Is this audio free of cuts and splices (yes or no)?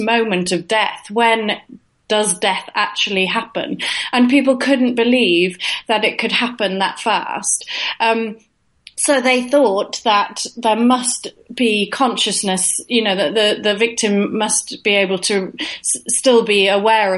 yes